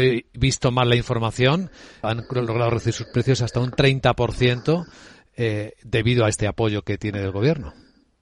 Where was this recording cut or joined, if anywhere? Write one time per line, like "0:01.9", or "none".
0:02.0